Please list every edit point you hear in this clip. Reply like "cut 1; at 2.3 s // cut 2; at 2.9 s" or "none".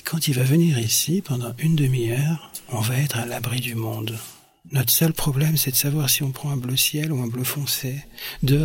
none